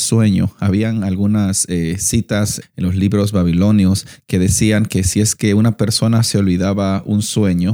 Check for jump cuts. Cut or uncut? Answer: cut